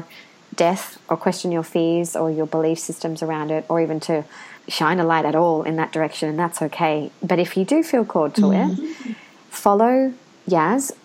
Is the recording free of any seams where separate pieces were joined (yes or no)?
no